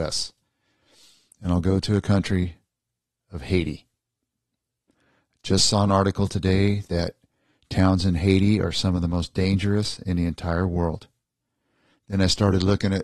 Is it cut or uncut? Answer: uncut